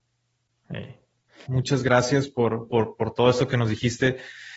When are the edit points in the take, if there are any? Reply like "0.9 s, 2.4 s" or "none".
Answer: 1.5 s, 2.7 s